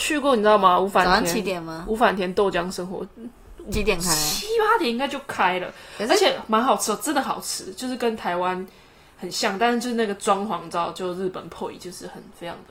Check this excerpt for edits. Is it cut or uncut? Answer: uncut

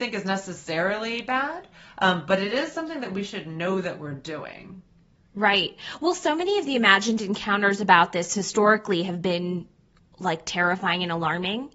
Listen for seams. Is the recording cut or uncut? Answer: uncut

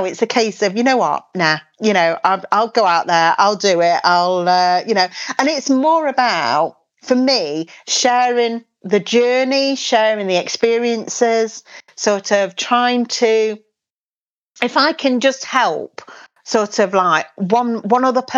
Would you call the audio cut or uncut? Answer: uncut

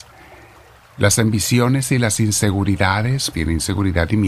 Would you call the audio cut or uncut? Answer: cut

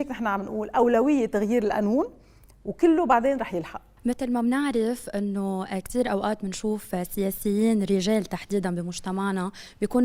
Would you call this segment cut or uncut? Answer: uncut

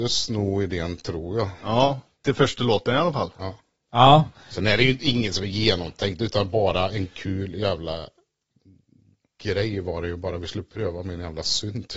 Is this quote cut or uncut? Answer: uncut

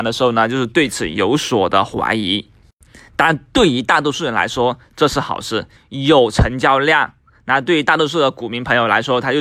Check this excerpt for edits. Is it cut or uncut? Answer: cut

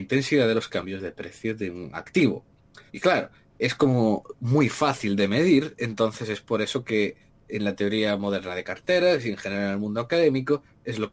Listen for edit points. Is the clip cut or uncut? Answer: cut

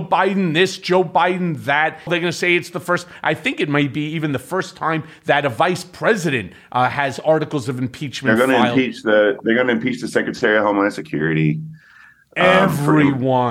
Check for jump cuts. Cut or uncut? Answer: cut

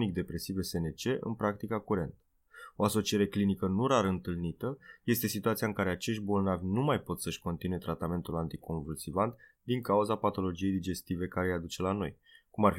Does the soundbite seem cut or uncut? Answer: uncut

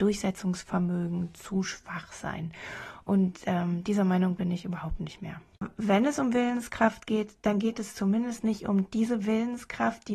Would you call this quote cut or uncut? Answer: uncut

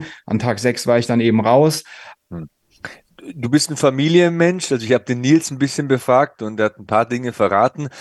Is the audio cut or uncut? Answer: cut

